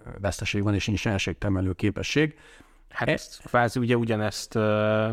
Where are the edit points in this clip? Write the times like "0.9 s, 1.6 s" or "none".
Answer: none

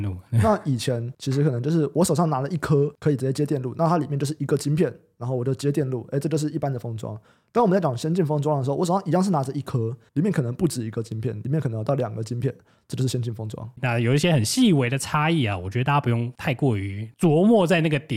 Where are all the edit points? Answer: 10.1 s, 13.8 s

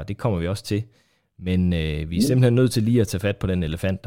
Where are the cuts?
none

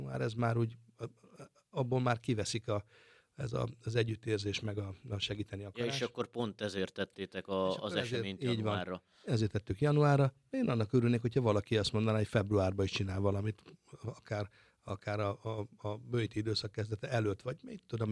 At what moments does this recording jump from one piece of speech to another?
none

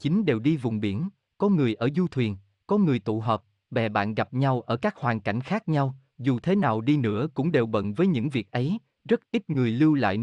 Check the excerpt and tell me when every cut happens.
none

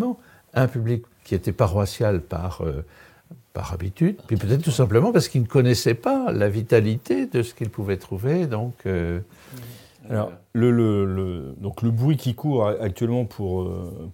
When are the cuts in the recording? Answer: 4.2 s

